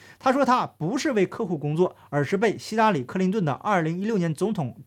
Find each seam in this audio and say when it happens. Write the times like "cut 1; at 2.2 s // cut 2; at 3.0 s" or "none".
none

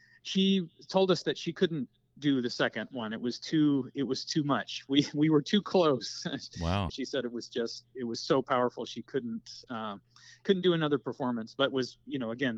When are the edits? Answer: cut 1; at 6.9 s

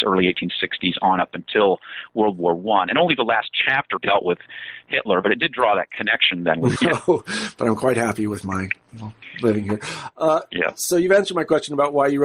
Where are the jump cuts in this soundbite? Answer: cut 1; at 4.0 s // cut 2; at 6.7 s

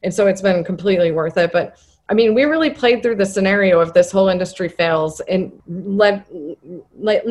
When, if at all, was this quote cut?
cut 1; at 5.6 s

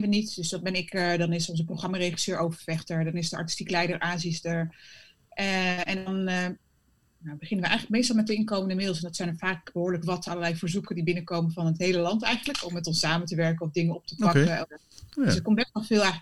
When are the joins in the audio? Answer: none

